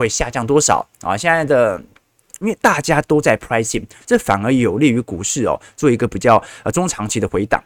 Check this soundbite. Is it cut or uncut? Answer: cut